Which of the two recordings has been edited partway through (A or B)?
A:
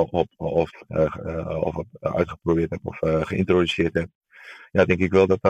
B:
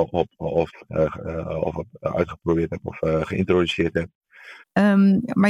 B